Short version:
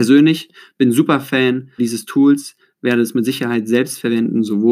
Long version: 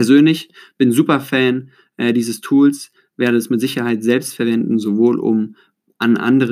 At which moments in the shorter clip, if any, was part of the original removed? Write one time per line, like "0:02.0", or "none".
0:01.8